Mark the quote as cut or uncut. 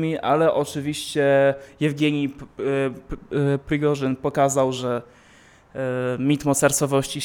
uncut